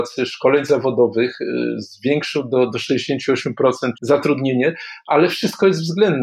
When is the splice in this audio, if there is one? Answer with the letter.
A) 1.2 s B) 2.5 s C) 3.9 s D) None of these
C